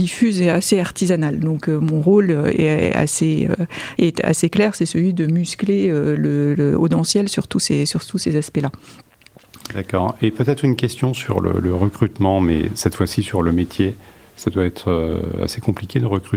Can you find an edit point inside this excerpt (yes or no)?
no